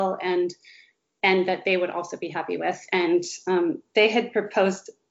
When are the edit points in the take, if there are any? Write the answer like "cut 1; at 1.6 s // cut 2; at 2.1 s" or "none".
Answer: none